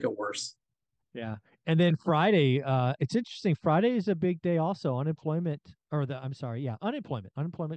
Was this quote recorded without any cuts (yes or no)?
yes